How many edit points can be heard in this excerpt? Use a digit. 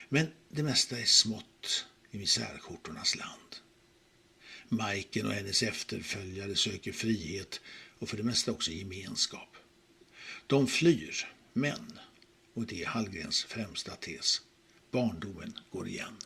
0